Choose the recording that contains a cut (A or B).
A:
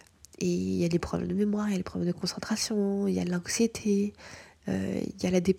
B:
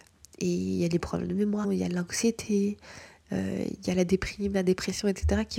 B